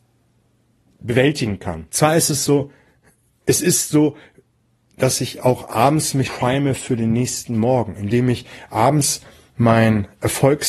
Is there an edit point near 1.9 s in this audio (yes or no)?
yes